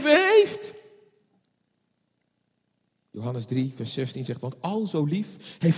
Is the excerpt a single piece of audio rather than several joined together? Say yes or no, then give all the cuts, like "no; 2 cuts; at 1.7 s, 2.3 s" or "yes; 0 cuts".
no; 1 cut; at 2.9 s